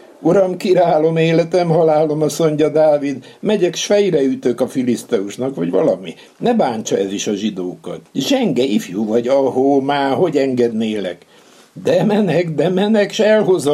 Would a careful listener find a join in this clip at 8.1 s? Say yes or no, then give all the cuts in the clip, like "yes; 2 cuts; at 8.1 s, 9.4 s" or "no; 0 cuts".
yes; 1 cut; at 8.1 s